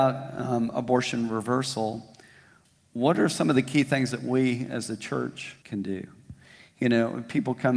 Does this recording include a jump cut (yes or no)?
yes